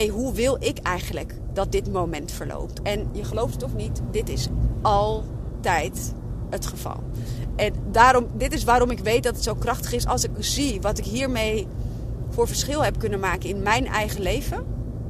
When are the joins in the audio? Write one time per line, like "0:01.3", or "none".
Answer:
0:02.8